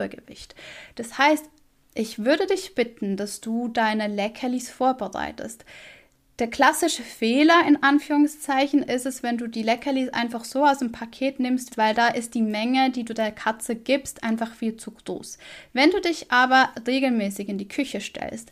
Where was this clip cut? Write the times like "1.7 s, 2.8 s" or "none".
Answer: 11.7 s